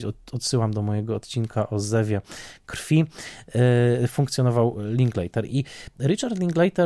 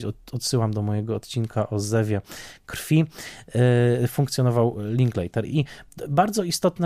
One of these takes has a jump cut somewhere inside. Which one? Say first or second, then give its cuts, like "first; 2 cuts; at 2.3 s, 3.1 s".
first; 1 cut; at 5.5 s